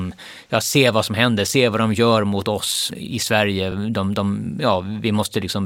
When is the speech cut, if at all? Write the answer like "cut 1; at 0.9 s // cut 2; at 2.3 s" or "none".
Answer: none